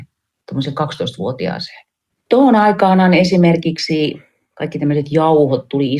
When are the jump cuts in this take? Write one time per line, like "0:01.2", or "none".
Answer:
0:02.1

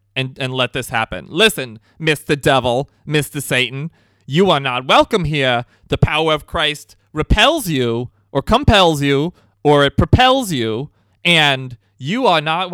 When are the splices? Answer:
0:11.1

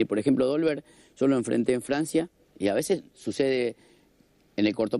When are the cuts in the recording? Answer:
0:02.5

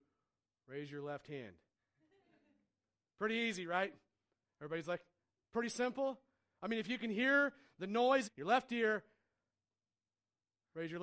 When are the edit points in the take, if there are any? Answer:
0:08.2

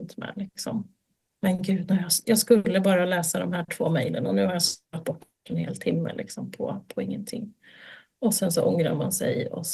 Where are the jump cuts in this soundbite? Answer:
none

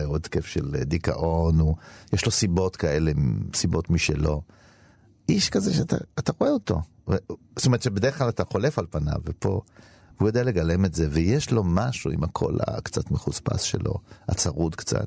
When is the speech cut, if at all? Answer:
none

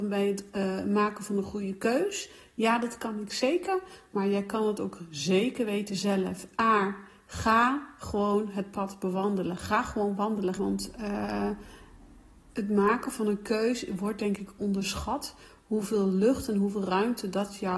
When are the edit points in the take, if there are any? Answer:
0:10.6
0:12.5

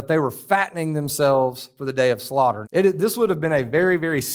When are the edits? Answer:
0:02.6

